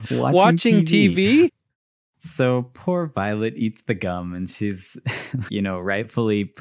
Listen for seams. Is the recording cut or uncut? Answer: cut